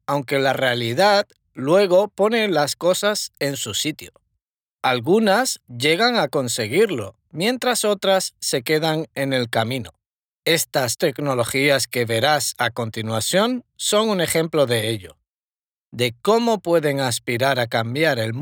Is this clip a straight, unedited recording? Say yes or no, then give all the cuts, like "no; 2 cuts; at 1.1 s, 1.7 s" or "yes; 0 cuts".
yes; 0 cuts